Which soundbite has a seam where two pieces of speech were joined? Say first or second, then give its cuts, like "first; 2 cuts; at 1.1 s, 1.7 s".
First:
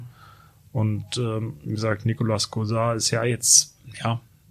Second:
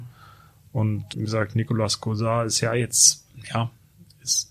second; 1 cut; at 1.1 s